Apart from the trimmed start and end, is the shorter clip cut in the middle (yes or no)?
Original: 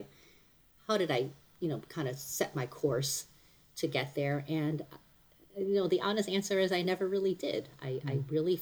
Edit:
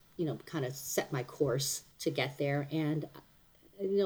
yes